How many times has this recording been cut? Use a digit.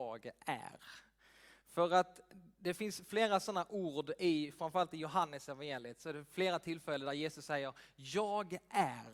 0